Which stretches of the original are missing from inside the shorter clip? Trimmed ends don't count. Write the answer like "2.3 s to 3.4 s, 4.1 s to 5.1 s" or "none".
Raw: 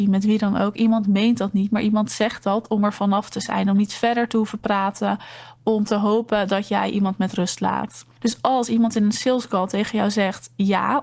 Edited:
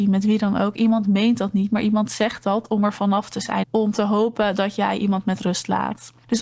3.6 s to 5.6 s

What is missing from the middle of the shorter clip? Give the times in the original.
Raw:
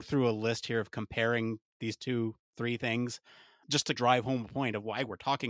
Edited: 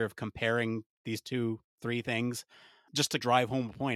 none

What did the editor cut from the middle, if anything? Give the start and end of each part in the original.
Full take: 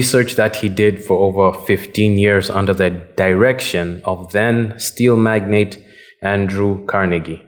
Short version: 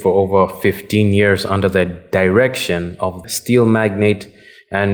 4.3 s to 4.7 s

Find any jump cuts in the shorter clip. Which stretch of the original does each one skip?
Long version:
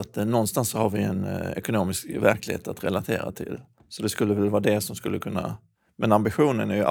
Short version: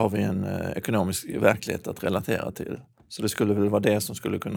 none

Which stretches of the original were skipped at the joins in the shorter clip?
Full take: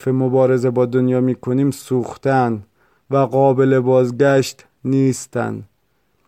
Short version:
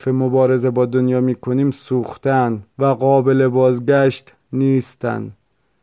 2.7 s to 3.0 s

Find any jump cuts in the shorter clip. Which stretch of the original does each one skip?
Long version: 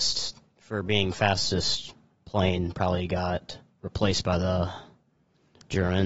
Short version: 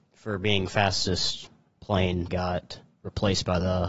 2.7 s to 3.1 s

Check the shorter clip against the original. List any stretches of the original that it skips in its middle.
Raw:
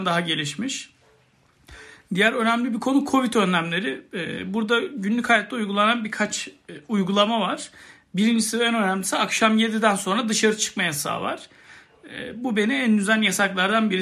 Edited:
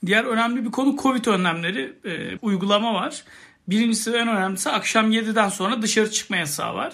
4.5 s to 6.8 s

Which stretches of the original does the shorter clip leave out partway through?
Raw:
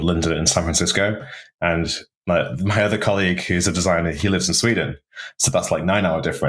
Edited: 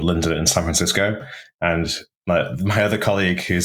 none

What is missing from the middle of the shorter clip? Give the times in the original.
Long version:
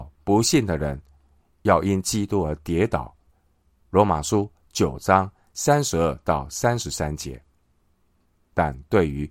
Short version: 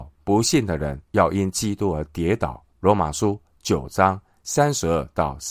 1.0 s to 1.5 s, 3.2 s to 3.8 s

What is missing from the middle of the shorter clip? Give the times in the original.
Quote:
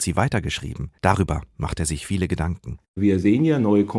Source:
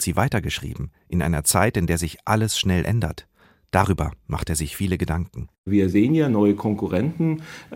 1.0 s to 3.7 s

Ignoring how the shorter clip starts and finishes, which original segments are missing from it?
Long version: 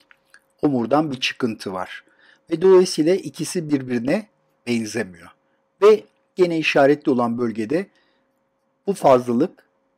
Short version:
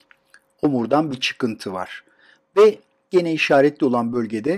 2.4 s to 5.7 s

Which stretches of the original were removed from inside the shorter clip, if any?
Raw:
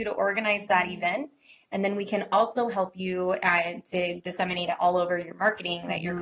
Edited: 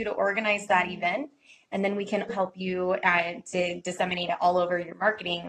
2.3 s to 2.7 s

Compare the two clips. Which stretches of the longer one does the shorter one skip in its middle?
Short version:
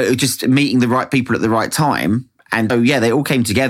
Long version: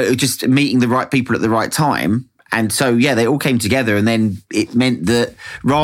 2.7 s to 2.8 s

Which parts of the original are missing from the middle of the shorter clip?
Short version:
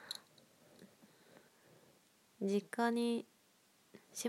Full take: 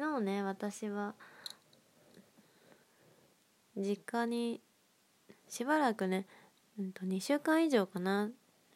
none

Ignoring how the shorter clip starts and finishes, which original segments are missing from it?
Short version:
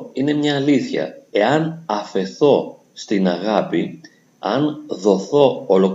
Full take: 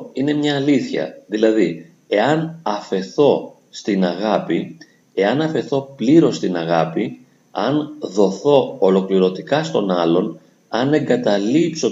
1.3 s to 2.0 s, 5.0 s to 7.4 s

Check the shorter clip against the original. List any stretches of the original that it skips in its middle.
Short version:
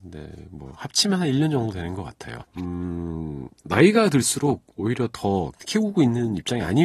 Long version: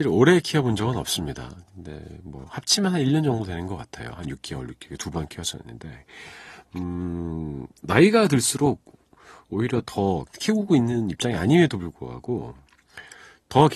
4.2 s to 6.6 s, 8.9 s to 9.4 s

